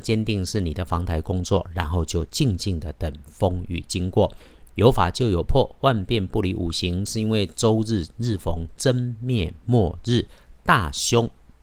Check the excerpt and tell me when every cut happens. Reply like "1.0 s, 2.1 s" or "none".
4.6 s, 7.1 s